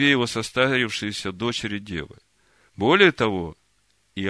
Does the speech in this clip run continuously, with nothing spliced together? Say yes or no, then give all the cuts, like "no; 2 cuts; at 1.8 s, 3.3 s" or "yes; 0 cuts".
no; 1 cut; at 2.7 s